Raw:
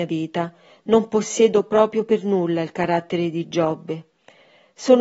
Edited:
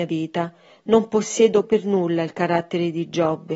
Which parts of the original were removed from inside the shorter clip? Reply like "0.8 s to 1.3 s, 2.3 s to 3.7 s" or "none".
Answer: 1.6 s to 2.0 s